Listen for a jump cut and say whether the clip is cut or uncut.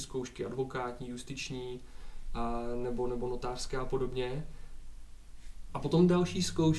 cut